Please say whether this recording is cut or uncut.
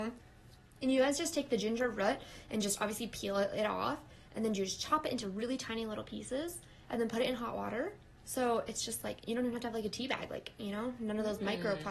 uncut